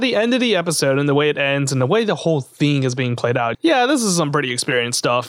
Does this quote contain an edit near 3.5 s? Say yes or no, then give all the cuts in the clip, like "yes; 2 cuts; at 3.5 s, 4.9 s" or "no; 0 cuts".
yes; 1 cut; at 3.5 s